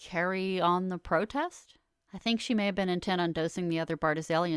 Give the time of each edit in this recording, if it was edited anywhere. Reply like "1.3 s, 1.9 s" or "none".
2.0 s